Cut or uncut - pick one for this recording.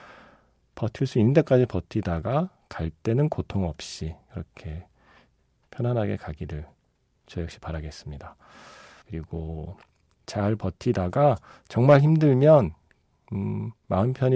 cut